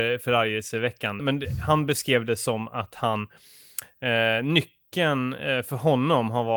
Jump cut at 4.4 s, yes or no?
no